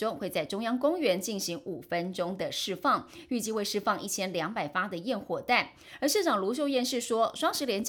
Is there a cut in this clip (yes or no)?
no